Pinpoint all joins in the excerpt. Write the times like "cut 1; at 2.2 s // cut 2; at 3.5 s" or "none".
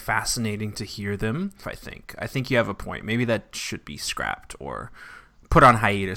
cut 1; at 1.6 s